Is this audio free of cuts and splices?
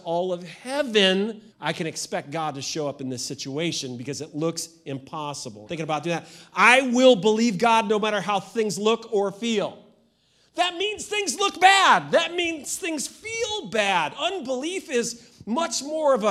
no; 2 cuts; at 1.5 s, 5.7 s

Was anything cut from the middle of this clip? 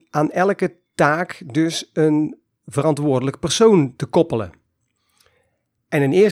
no; 0 cuts

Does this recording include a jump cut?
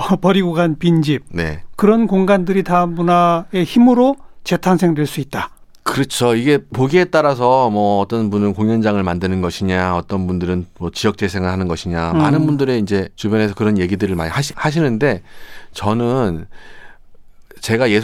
yes; 1 cut; at 13.1 s

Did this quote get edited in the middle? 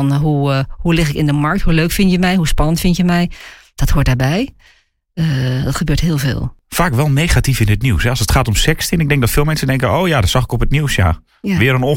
no; 0 cuts

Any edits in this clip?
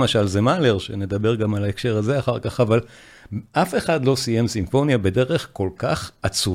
no; 0 cuts

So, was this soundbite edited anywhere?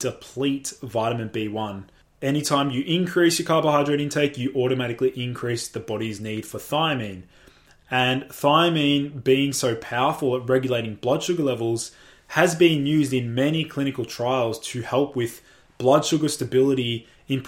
no; 0 cuts

